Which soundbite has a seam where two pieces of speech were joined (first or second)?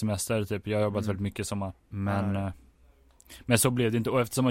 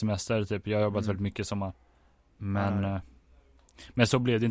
first